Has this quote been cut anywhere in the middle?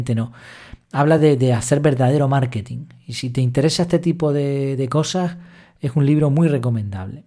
no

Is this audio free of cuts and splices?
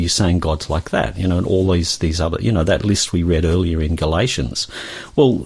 yes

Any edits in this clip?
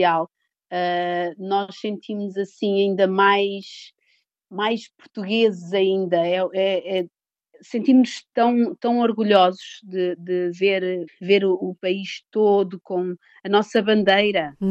yes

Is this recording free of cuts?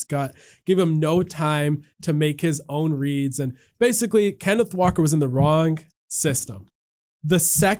yes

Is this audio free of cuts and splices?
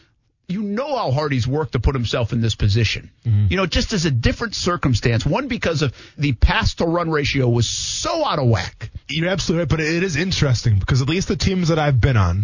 no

